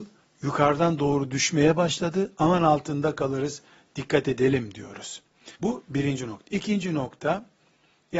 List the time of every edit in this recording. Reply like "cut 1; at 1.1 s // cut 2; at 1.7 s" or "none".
cut 1; at 5.6 s